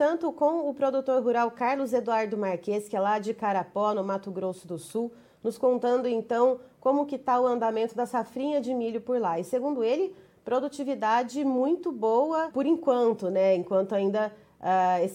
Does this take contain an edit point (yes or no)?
yes